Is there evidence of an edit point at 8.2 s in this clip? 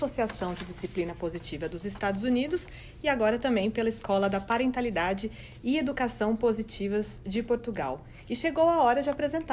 no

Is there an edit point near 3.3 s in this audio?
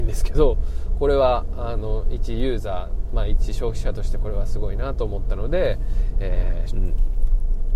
no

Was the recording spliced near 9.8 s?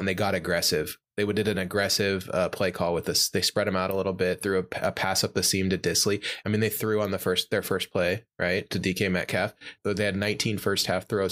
yes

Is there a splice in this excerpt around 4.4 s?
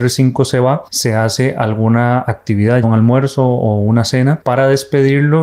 no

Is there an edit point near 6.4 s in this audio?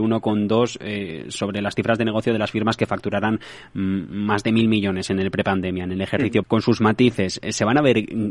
yes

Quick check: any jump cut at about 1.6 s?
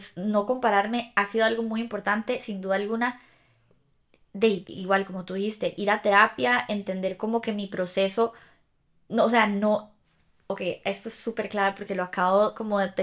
no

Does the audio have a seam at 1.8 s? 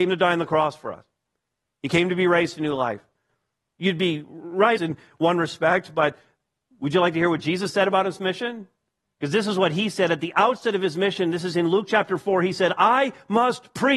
no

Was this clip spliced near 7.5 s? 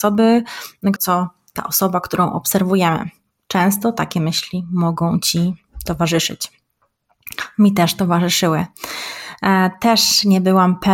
no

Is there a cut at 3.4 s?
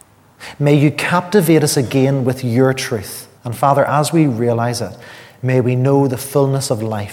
yes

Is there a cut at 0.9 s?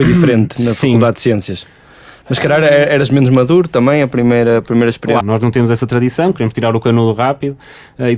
no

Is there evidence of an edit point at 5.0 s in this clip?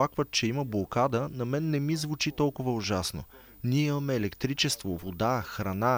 no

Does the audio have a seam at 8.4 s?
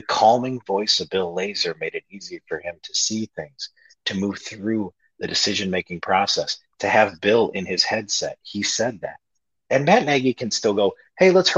no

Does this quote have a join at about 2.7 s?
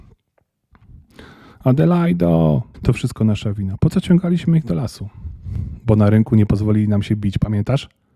yes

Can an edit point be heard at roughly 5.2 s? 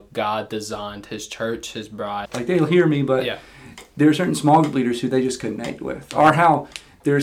no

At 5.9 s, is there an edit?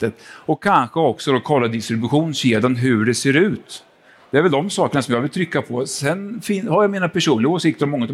no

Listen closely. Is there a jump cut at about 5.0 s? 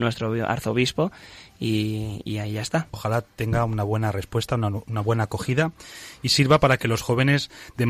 no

